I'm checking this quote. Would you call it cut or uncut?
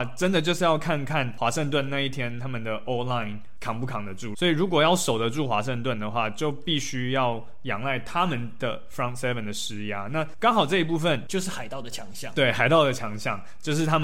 cut